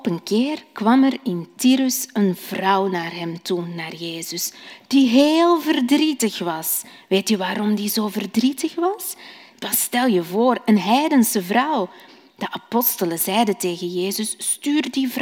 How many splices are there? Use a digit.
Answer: 1